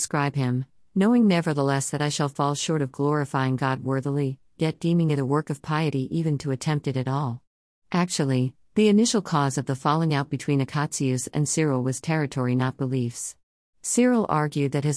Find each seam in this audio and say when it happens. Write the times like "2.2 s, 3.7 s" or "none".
7.8 s, 13.7 s